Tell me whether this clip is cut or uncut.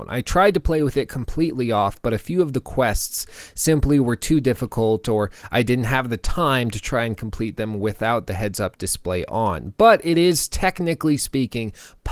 uncut